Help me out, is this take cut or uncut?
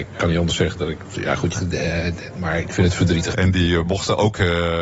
cut